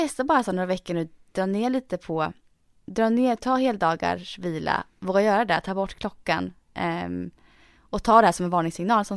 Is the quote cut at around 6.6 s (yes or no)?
no